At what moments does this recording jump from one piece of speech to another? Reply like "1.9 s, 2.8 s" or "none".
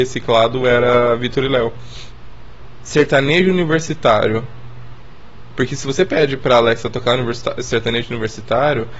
2.8 s